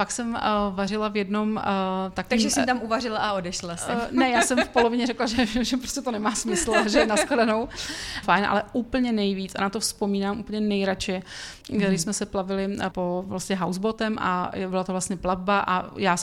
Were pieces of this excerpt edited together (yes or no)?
yes